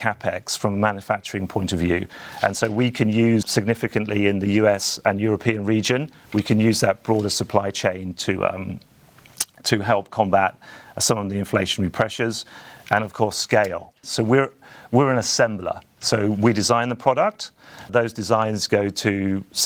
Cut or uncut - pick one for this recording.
cut